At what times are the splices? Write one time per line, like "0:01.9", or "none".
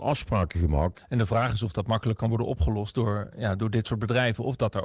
0:00.9